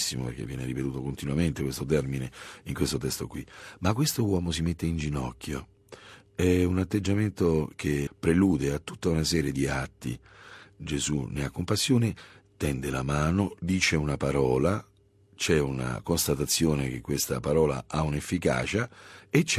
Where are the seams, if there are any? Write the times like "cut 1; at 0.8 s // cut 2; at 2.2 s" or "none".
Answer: cut 1; at 13.6 s